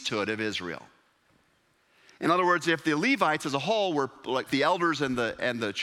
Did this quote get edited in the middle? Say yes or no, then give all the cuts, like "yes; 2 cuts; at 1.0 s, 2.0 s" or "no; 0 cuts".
yes; 1 cut; at 4.5 s